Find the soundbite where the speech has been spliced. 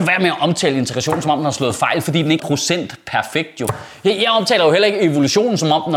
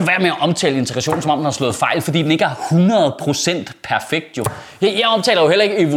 first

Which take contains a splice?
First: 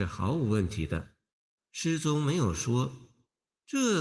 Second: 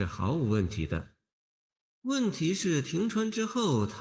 first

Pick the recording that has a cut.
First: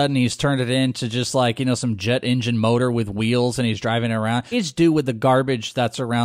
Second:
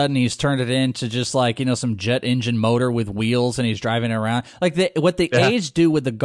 first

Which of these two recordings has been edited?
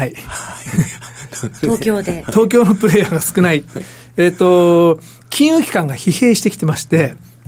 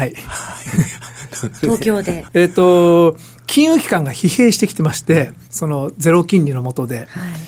second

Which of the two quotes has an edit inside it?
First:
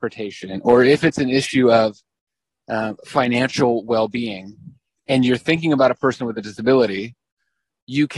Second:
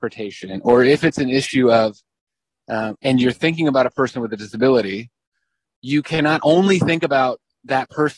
second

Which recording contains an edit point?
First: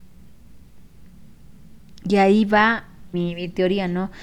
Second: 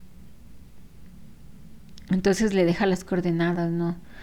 first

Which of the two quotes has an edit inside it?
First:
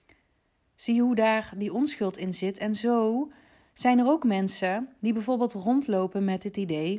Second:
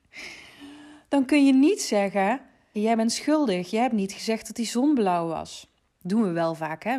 second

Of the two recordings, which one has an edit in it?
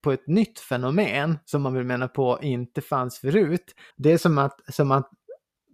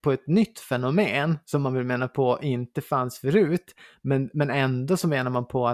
first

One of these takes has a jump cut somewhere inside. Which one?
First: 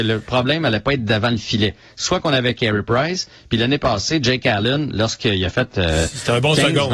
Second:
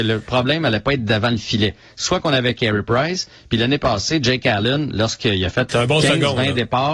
second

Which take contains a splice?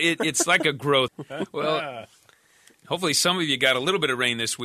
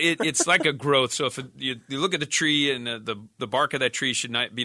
first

